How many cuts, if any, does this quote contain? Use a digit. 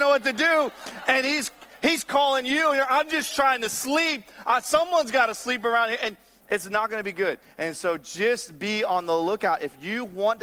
0